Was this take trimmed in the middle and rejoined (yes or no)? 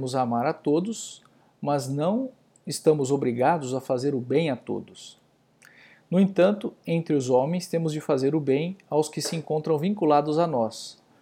no